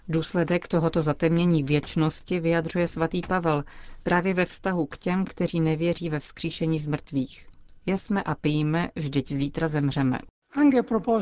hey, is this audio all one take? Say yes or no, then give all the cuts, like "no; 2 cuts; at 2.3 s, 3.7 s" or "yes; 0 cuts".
yes; 0 cuts